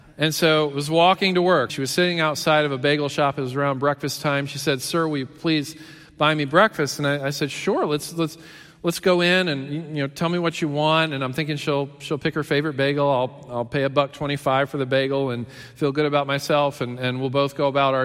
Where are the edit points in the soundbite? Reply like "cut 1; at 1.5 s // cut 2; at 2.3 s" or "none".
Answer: cut 1; at 1.7 s